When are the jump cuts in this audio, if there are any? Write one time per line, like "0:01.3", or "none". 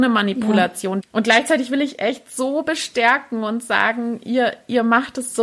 0:01.0